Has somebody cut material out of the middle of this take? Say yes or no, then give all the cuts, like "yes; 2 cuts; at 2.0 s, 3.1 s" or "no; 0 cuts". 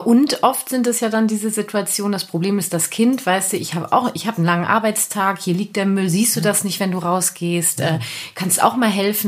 no; 0 cuts